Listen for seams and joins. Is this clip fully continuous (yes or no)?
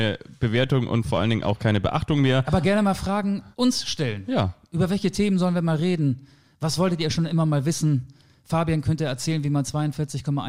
no